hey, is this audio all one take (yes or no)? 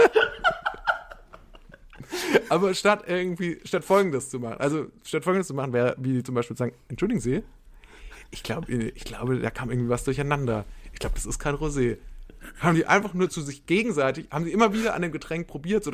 yes